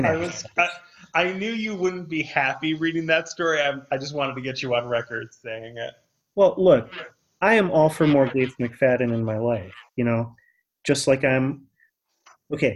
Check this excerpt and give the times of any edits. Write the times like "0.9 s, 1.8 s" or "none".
9.9 s